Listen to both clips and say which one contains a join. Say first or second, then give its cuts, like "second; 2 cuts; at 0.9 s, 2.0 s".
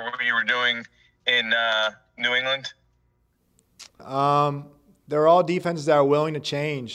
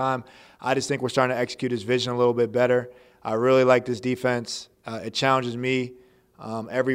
first; 1 cut; at 4.0 s